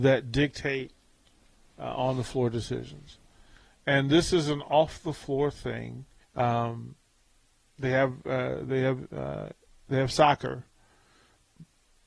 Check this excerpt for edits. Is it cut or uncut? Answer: cut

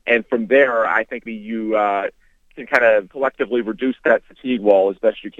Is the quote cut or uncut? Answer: cut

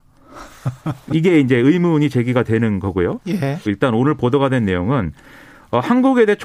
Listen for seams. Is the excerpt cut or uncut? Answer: cut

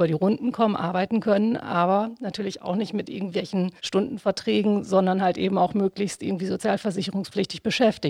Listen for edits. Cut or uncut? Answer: cut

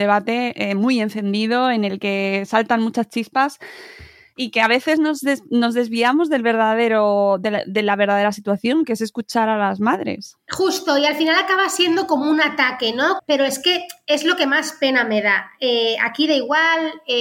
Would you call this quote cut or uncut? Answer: cut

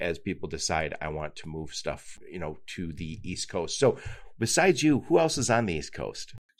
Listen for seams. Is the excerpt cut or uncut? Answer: uncut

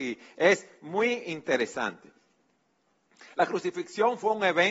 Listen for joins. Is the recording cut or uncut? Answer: uncut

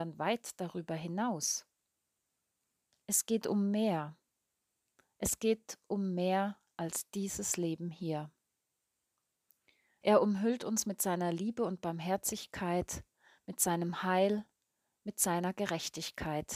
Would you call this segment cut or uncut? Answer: cut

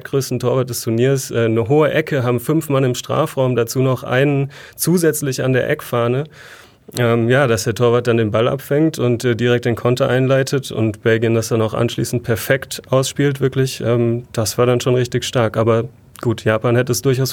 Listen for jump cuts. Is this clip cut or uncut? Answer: uncut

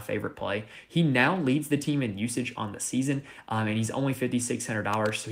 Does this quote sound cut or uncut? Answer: uncut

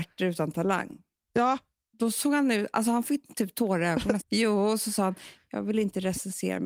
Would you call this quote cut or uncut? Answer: cut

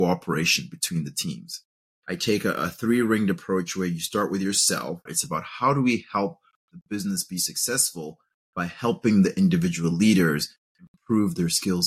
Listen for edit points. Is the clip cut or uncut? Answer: cut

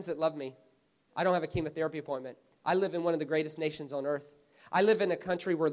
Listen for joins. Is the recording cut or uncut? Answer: cut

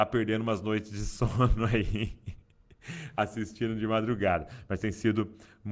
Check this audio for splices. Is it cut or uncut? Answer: uncut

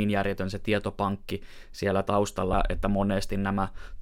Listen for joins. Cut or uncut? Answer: uncut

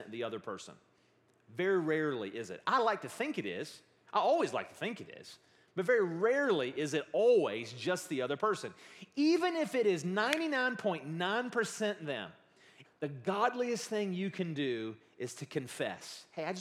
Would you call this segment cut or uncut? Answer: cut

